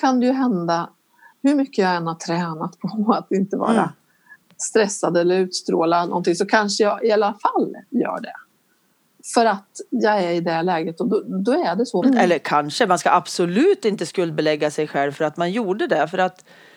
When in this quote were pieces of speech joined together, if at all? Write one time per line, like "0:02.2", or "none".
0:12.0